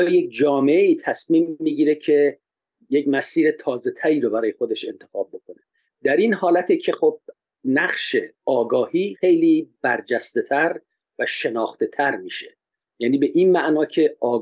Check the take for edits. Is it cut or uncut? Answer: cut